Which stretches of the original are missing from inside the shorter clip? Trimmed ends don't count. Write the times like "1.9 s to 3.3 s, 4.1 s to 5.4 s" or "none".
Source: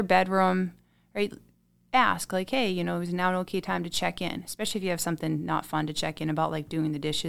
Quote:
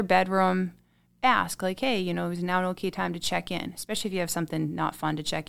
1.1 s to 1.8 s